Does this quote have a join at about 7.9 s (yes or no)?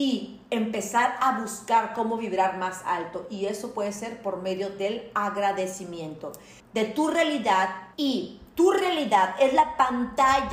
yes